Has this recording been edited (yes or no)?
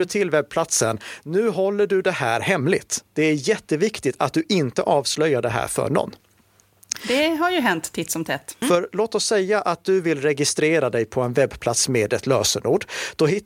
yes